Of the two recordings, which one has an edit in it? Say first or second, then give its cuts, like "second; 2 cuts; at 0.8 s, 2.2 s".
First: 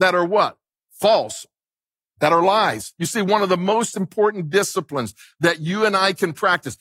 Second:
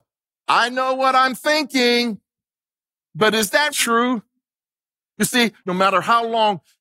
second; 2 cuts; at 3.7 s, 5.6 s